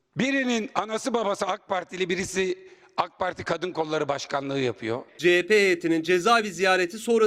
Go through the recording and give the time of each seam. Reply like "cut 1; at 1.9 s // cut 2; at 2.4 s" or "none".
cut 1; at 5.1 s